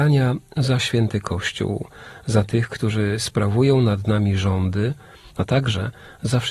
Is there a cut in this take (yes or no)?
yes